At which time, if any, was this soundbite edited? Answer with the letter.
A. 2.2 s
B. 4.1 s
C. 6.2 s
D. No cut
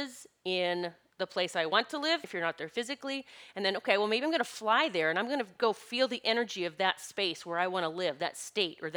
A